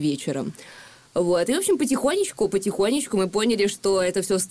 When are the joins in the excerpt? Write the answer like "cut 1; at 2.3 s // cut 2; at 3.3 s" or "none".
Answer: none